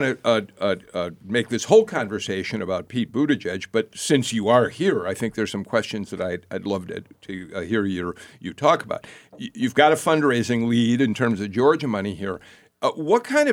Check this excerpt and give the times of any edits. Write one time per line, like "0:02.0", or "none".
none